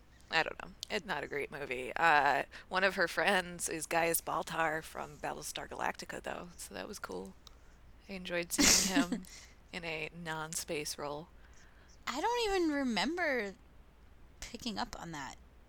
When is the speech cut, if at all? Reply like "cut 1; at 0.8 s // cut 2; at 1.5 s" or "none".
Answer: none